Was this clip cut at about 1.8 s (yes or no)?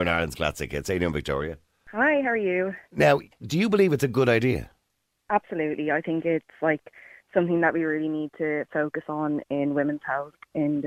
no